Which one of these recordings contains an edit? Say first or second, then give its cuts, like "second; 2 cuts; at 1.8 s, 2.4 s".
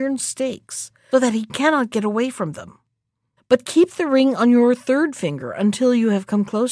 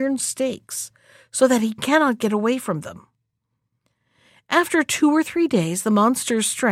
first; 2 cuts; at 1.1 s, 3.4 s